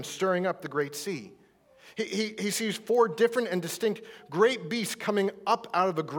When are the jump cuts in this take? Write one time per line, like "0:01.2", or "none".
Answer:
none